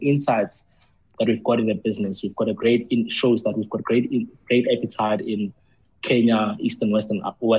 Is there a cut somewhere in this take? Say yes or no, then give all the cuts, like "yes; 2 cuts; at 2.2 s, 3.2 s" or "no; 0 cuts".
no; 0 cuts